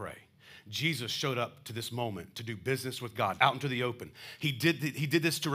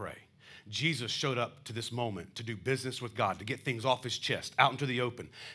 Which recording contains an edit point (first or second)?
first